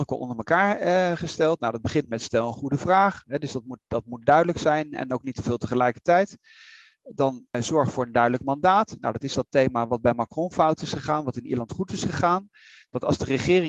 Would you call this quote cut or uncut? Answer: uncut